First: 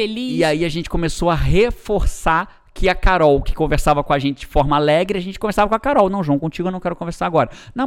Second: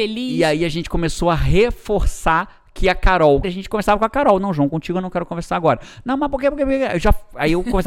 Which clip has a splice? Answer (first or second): second